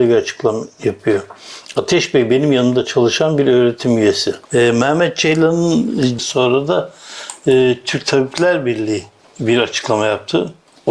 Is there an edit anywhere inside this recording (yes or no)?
yes